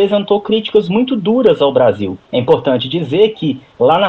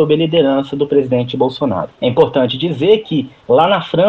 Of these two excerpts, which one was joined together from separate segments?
second; 1 cut; at 1.9 s

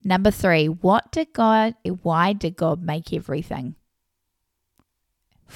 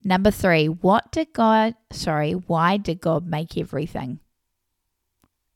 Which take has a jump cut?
first; 1 cut; at 1.9 s

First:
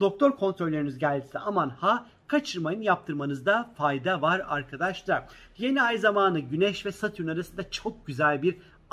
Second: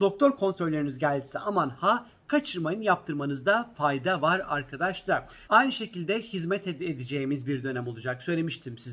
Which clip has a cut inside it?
second; 1 cut; at 5.5 s

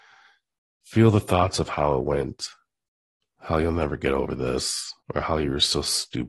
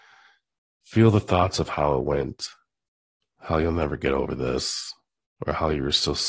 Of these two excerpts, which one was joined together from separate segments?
first; 1 cut; at 5.0 s

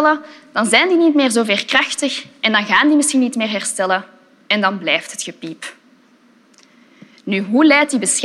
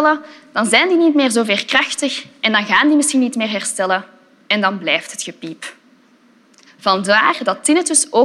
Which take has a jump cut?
second; 1 cut; at 6.7 s

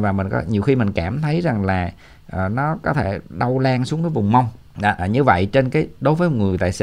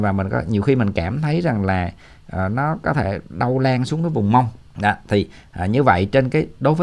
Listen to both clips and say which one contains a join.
first; 1 cut; at 5.0 s

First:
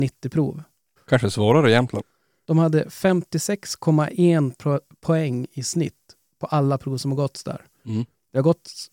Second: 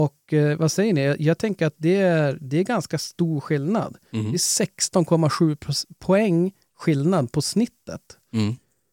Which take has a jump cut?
first; 2 cuts; at 1.0 s, 2.4 s

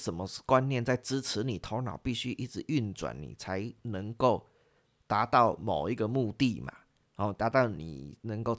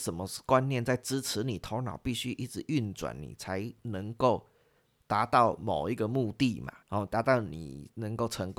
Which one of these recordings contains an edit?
second; 1 cut; at 6.8 s

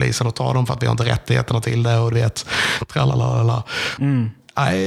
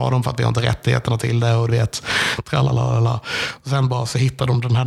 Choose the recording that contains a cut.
first; 1 cut; at 4.0 s

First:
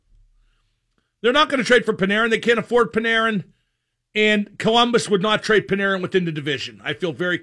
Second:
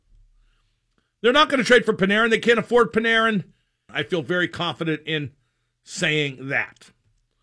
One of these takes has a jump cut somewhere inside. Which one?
second; 1 cut; at 3.9 s

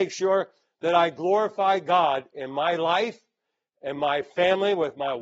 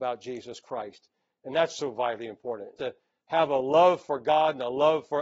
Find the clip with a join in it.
second; 1 cut; at 2.8 s

